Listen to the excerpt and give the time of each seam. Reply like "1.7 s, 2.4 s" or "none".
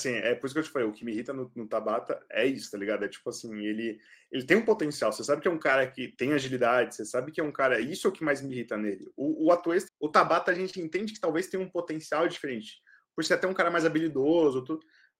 9.9 s